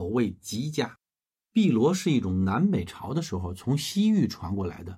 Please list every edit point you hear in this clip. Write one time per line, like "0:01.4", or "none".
0:01.4

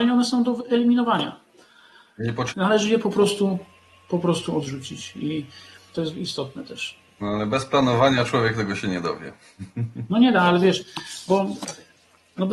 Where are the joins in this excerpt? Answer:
0:02.5
0:05.9

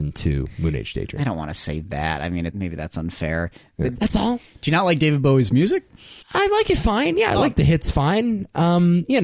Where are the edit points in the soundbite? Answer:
0:04.0
0:06.2

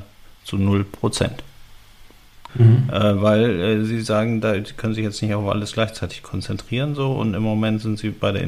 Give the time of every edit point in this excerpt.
0:02.5

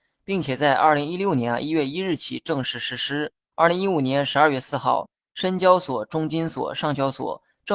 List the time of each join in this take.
0:03.5

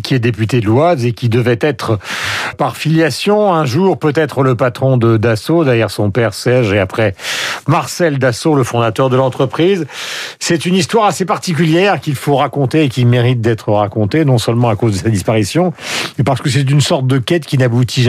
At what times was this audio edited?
0:02.5

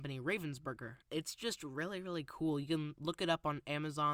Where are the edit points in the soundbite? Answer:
0:01.0

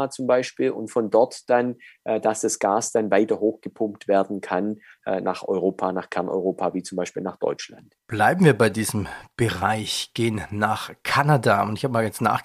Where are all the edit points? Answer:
0:08.0

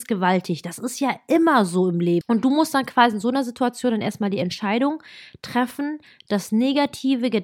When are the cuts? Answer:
0:02.2

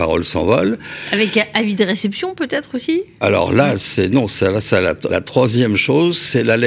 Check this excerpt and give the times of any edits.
0:05.1

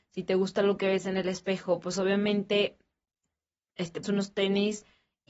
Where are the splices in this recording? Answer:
0:04.0

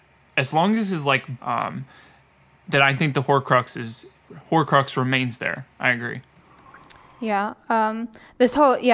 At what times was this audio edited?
0:01.4

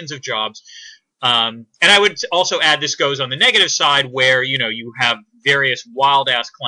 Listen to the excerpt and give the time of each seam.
0:01.1

